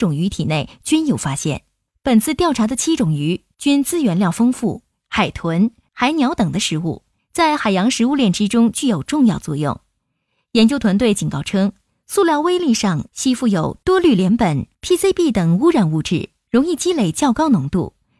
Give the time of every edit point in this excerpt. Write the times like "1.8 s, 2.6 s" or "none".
5.0 s